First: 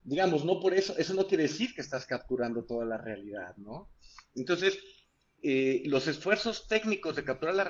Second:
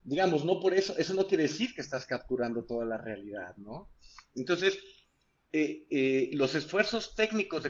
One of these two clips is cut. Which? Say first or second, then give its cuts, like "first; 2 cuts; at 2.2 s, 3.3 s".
first; 1 cut; at 5.4 s